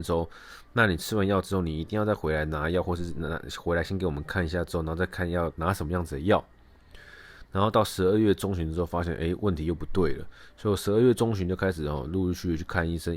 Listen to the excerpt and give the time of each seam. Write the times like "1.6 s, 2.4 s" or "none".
7.4 s